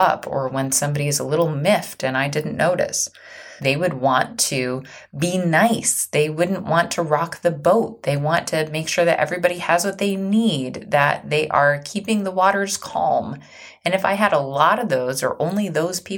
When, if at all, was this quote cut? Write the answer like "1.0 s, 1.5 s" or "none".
3.6 s

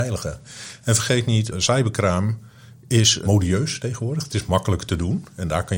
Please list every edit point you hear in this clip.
1.5 s

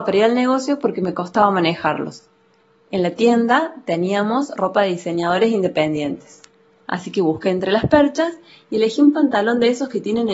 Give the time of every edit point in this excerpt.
none

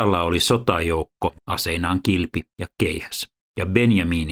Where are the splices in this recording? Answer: 1.4 s

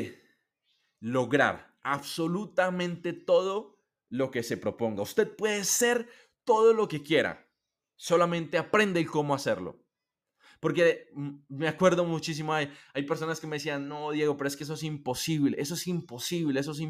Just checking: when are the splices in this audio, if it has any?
none

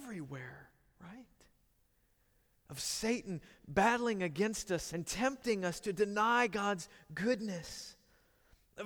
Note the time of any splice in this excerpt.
2.5 s, 4.9 s

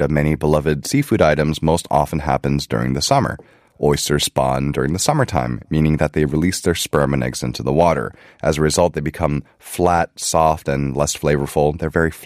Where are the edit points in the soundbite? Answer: none

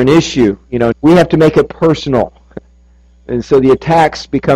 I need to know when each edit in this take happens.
0.9 s

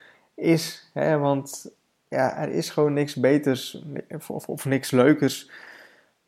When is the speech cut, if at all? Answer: none

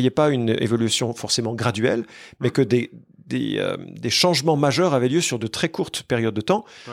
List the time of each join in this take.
none

